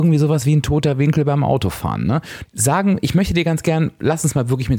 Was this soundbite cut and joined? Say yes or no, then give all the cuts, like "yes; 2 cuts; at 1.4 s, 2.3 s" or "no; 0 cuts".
yes; 1 cut; at 2.5 s